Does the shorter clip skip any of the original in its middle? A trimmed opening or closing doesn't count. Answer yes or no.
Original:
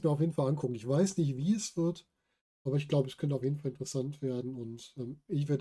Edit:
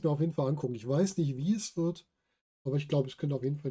no